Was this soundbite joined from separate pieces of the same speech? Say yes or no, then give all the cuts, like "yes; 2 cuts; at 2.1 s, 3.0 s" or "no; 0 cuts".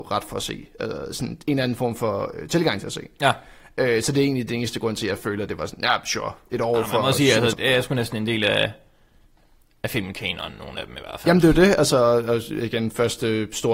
yes; 1 cut; at 7.5 s